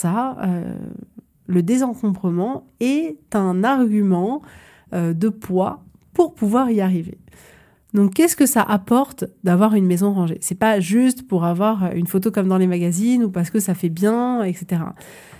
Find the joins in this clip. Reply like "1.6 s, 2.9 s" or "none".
7.7 s